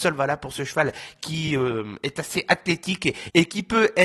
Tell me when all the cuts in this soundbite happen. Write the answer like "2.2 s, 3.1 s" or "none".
none